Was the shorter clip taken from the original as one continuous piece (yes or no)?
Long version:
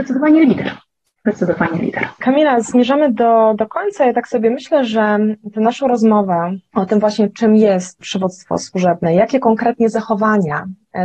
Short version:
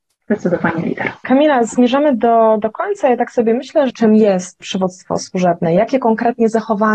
no